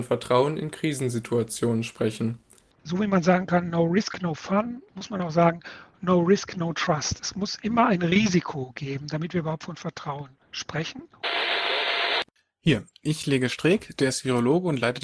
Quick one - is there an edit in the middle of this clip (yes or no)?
no